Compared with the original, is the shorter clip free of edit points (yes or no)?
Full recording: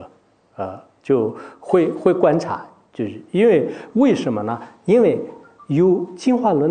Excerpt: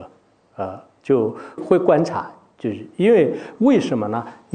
no